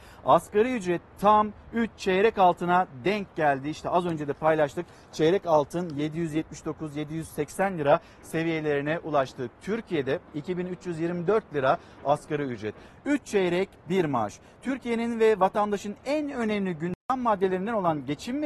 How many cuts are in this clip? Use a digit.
2